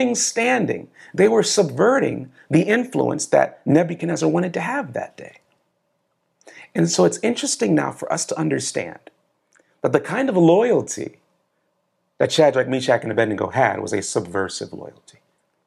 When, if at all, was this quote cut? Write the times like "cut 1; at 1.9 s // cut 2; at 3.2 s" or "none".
none